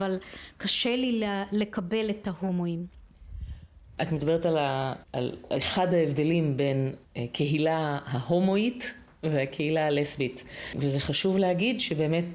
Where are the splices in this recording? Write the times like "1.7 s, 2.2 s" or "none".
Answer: none